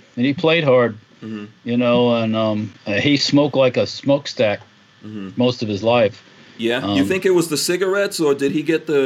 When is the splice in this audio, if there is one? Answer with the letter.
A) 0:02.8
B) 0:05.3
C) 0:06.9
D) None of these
A